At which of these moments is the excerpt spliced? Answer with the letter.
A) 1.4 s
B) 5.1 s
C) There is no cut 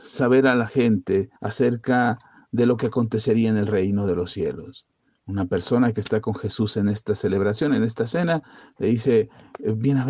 A